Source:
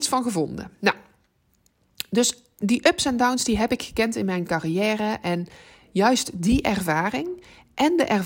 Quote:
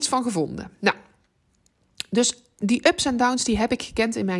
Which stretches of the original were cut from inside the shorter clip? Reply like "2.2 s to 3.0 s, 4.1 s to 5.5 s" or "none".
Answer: none